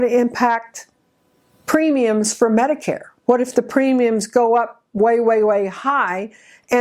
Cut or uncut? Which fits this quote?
uncut